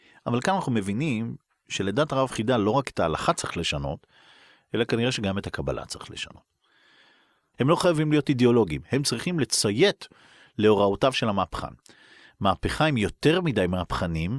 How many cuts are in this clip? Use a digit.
1